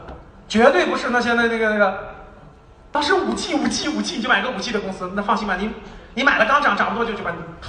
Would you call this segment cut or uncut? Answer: uncut